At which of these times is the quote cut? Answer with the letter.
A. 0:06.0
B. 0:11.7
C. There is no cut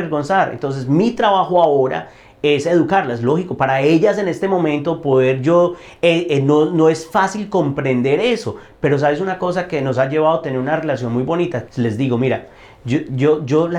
B